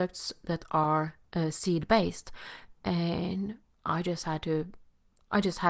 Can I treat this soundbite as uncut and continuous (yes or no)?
yes